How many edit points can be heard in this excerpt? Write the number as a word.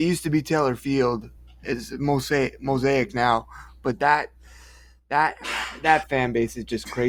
zero